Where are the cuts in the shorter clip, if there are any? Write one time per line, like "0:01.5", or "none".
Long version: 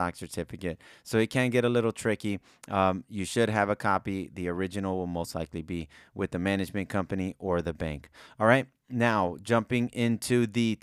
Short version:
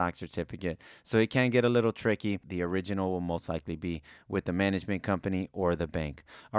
0:02.4